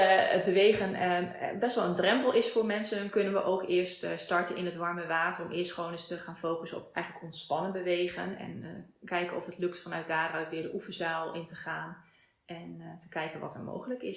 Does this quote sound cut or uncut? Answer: uncut